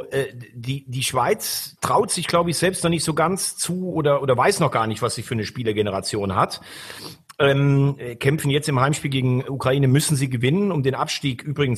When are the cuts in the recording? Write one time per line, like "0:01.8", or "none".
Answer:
none